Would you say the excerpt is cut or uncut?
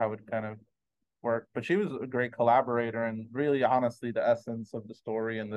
uncut